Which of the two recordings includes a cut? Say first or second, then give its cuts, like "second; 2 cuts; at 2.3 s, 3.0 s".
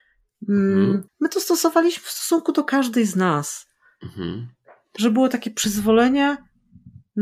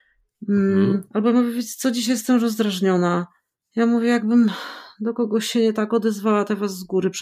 first; 1 cut; at 1.1 s